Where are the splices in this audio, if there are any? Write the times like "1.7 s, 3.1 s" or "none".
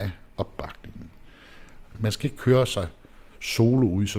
1.8 s